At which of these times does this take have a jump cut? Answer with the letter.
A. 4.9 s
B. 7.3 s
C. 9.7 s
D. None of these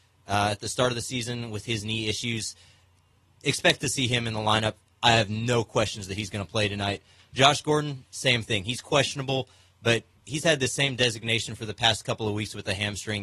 D